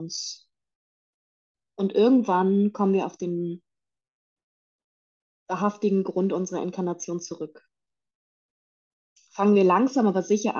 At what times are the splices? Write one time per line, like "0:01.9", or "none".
none

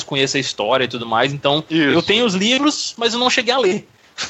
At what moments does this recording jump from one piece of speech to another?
none

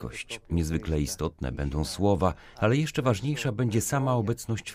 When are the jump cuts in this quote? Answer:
0:02.5

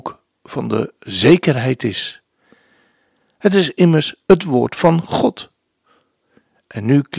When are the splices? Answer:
none

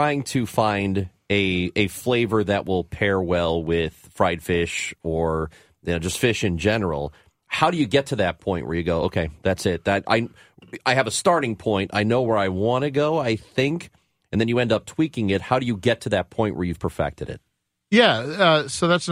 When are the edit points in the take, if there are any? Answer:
none

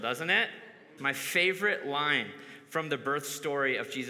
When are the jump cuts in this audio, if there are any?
0:01.0

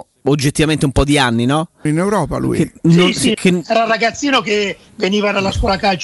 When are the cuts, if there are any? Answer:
0:01.9
0:03.3

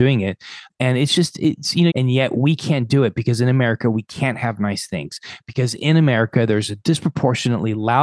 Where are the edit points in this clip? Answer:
0:01.9

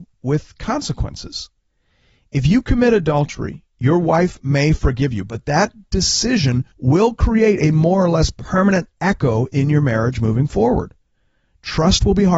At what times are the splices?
0:06.7

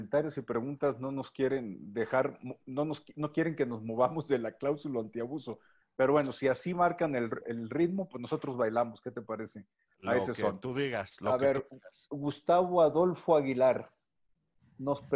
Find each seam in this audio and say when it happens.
0:07.4

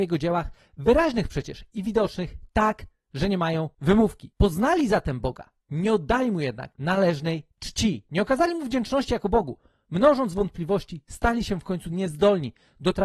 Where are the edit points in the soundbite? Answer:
none

